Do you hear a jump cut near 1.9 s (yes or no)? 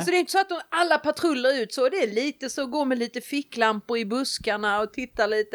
no